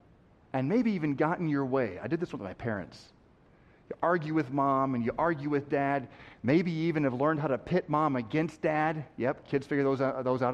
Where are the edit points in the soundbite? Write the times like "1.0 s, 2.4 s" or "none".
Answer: none